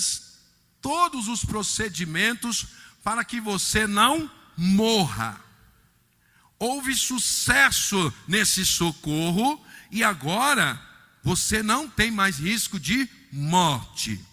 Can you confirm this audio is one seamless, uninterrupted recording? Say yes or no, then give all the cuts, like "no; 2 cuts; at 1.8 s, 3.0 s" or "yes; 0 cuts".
yes; 0 cuts